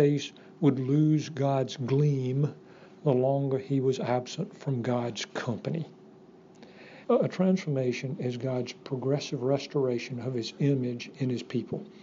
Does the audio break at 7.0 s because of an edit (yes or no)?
yes